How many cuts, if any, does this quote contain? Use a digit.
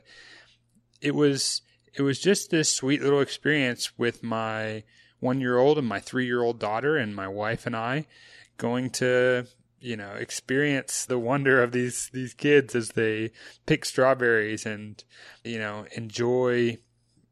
2